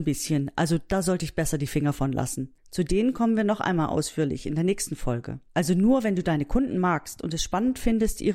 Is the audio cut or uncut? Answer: cut